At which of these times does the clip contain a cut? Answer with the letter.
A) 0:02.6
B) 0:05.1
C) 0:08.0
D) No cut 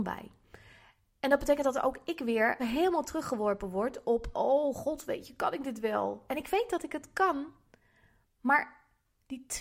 A